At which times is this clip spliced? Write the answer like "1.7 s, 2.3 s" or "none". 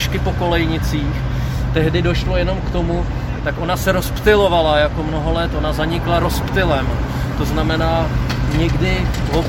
3.4 s